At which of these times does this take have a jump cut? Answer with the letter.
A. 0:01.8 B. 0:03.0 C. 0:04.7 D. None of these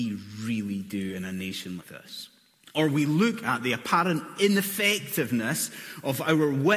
A